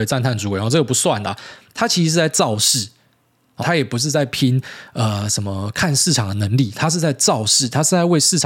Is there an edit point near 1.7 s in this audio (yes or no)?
yes